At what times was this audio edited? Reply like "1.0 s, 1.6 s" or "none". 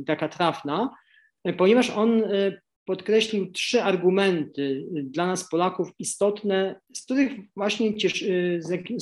6.8 s